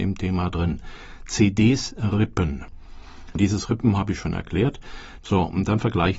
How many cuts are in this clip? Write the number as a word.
one